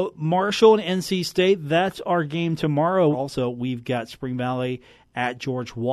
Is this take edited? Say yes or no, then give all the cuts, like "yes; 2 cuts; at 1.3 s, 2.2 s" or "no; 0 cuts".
yes; 1 cut; at 3.1 s